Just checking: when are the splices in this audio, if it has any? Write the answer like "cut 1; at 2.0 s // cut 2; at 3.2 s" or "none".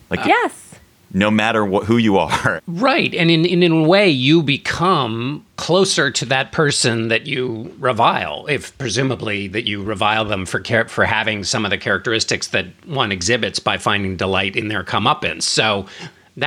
cut 1; at 2.6 s // cut 2; at 5.5 s

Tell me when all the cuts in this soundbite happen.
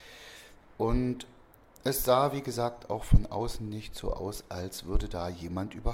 none

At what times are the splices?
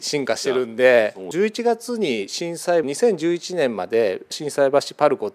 cut 1; at 2.8 s

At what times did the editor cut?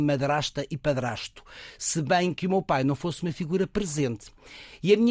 none

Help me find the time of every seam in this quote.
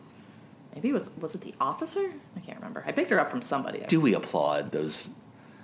cut 1; at 2.3 s // cut 2; at 3.9 s

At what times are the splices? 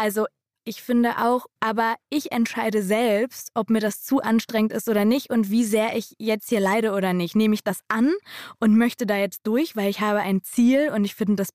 cut 1; at 1.6 s

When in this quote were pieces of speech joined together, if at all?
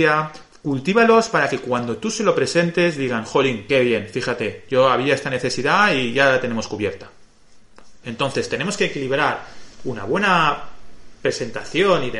cut 1; at 8.0 s

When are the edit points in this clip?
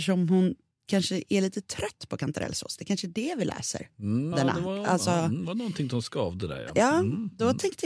cut 1; at 4.3 s

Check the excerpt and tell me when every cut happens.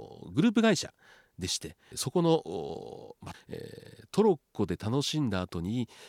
cut 1; at 1.9 s // cut 2; at 3.3 s

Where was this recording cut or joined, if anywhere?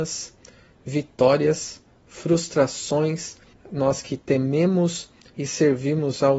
cut 1; at 3.5 s

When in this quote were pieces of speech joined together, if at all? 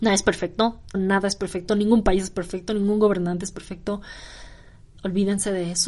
cut 1; at 0.9 s

